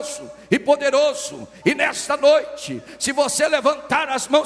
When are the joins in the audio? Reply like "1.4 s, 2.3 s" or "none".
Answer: 1.6 s